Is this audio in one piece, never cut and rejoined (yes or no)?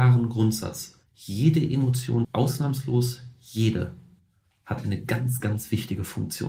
no